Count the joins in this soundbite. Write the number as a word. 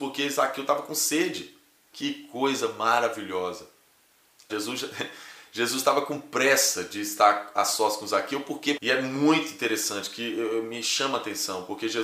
three